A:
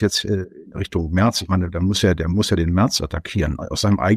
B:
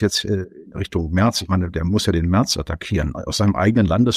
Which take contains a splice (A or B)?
B